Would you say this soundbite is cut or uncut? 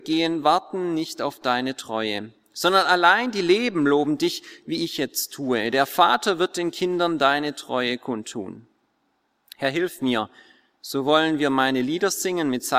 uncut